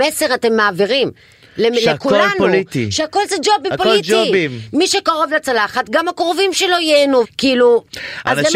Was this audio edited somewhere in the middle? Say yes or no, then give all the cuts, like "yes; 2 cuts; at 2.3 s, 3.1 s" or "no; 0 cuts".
yes; 2 cuts; at 3.7 s, 7.2 s